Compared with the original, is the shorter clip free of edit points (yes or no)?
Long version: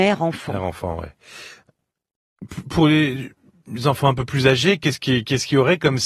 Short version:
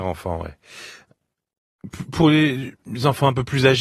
no